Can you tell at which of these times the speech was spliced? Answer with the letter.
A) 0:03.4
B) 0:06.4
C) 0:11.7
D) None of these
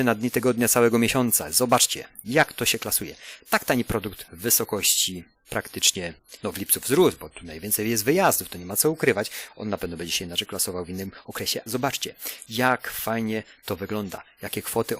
C